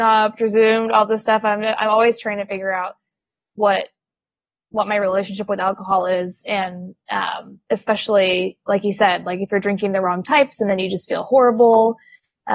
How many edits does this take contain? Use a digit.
0